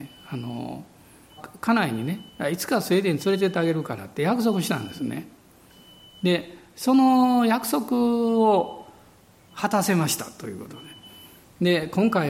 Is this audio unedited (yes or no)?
no